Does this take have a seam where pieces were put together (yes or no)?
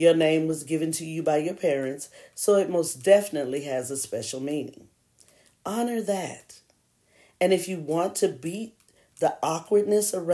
no